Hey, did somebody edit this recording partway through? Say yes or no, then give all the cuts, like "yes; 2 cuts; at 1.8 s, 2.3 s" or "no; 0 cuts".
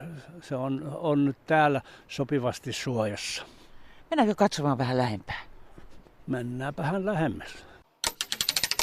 no; 0 cuts